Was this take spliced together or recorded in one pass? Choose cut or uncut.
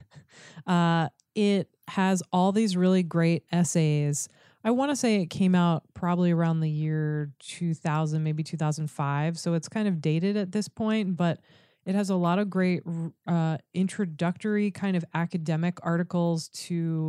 uncut